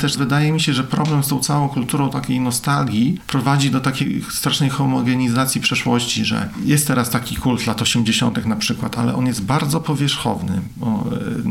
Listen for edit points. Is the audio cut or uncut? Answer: uncut